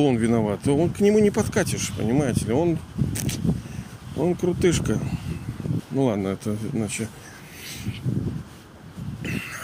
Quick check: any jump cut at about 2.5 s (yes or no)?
no